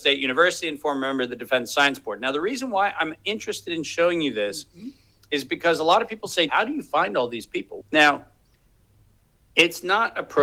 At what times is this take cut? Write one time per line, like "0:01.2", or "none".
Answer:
0:06.5
0:07.8